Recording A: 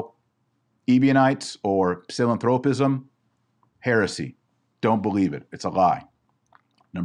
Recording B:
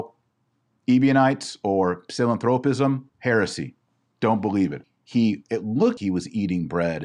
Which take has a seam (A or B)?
B